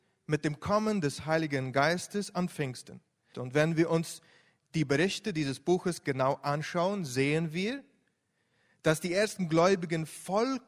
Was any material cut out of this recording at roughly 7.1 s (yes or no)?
no